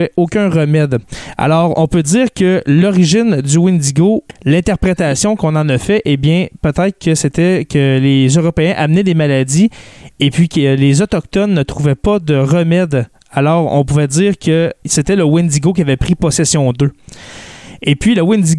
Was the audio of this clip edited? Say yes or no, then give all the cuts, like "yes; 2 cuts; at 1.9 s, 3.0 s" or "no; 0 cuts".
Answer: no; 0 cuts